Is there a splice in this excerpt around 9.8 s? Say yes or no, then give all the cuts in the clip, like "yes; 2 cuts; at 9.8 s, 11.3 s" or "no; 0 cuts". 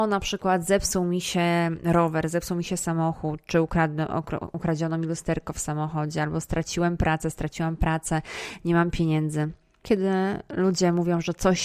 yes; 1 cut; at 9.8 s